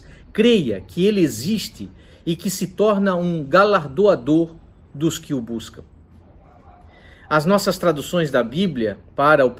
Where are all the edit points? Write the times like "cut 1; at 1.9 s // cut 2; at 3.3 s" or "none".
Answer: none